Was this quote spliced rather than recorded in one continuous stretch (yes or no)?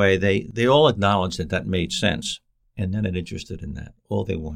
yes